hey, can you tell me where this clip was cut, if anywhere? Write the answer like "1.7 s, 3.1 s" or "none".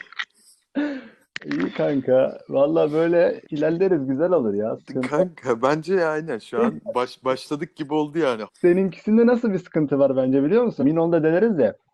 3.4 s, 8.5 s, 10.8 s